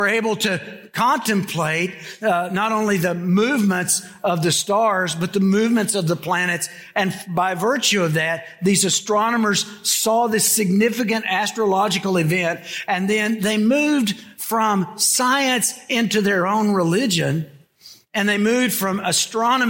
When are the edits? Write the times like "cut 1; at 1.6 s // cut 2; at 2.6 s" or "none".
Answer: none